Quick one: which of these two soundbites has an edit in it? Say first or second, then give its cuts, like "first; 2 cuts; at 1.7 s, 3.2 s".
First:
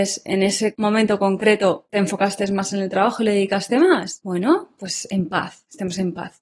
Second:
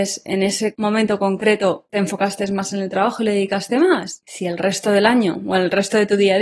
second; 1 cut; at 4.2 s